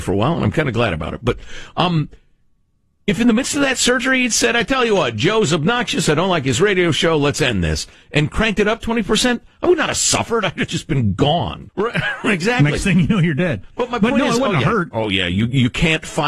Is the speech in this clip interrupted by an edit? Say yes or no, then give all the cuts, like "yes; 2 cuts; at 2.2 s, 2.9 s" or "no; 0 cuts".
yes; 1 cut; at 11.7 s